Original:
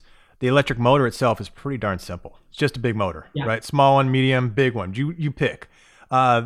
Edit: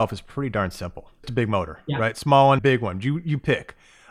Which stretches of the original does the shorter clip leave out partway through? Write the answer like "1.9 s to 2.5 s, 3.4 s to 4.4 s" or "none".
2.5 s to 2.7 s, 4.1 s to 4.5 s